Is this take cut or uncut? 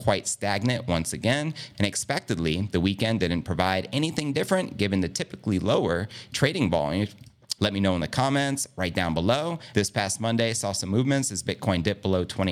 cut